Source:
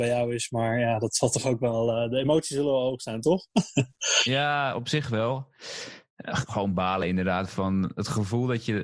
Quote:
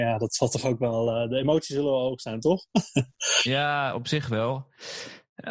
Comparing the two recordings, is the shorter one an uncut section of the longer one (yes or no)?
yes